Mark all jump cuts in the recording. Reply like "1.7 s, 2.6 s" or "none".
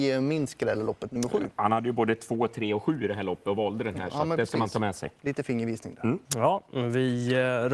6.3 s